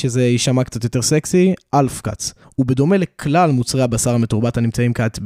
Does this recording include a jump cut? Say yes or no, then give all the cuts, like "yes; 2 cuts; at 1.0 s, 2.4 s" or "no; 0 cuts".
yes; 1 cut; at 2.4 s